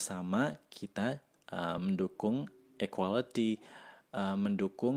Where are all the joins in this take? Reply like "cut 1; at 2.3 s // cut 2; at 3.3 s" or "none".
none

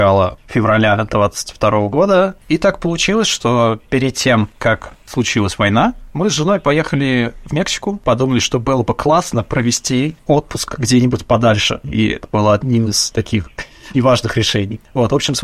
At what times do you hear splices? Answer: cut 1; at 13.9 s

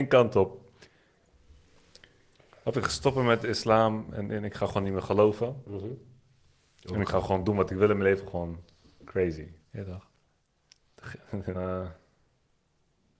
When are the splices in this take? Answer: cut 1; at 9.6 s // cut 2; at 11.5 s

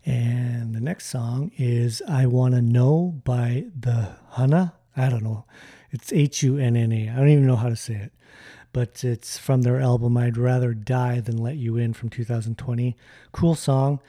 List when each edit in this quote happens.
cut 1; at 4.9 s

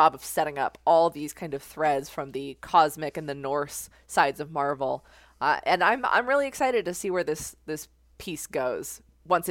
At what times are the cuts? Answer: none

